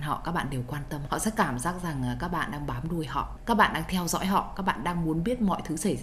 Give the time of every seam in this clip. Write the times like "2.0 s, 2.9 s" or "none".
1.1 s

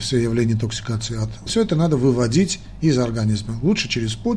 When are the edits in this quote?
1.5 s

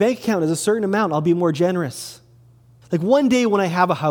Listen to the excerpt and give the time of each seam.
2.8 s

